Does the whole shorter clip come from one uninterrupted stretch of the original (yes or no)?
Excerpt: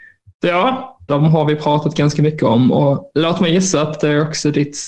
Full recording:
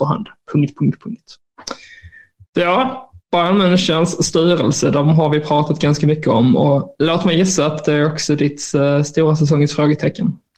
no